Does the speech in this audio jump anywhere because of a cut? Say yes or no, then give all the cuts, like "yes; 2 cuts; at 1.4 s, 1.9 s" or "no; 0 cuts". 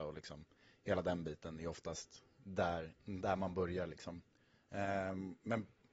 no; 0 cuts